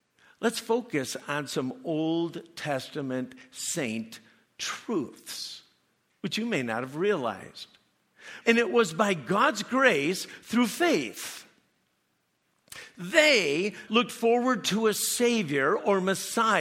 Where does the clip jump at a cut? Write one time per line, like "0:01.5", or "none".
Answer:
0:08.4
0:13.9